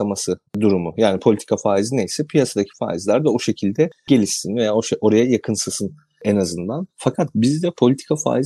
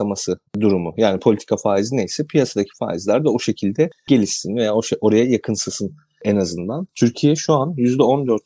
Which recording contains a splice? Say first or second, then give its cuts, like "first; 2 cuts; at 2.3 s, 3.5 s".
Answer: second; 1 cut; at 6.9 s